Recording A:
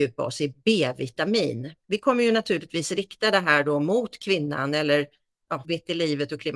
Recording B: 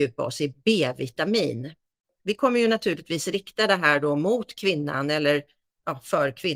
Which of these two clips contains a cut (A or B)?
A